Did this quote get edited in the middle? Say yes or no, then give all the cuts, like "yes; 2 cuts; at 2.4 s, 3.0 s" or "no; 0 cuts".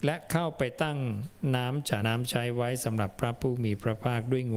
yes; 1 cut; at 2.0 s